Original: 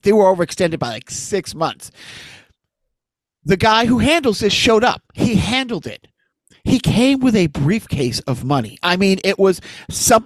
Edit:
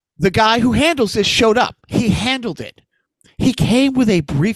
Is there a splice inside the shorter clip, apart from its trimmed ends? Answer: no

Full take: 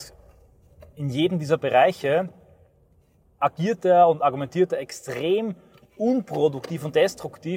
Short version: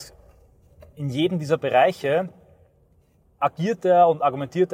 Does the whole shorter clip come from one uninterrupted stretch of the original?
yes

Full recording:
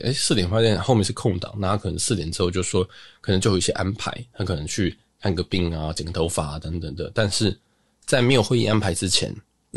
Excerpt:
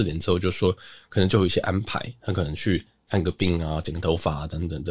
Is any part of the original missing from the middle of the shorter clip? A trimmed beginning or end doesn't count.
no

